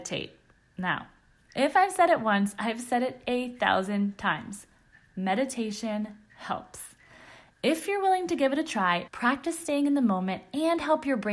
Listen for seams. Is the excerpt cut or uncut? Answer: cut